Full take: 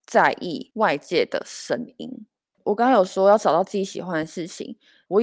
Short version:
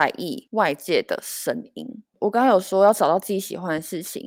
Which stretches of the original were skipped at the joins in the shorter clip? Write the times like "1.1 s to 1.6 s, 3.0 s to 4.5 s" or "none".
2.4 s to 2.6 s